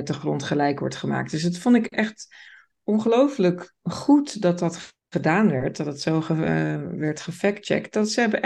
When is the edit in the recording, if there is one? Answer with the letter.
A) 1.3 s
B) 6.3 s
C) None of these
C